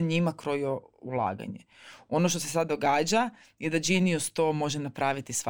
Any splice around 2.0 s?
no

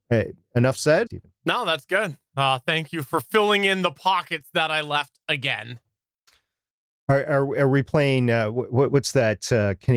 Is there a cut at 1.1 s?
yes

